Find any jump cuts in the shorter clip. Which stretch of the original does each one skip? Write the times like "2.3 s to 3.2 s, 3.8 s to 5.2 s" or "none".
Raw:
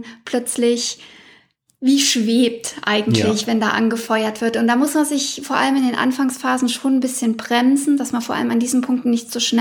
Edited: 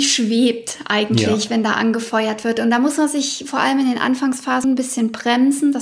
6.6 s to 6.9 s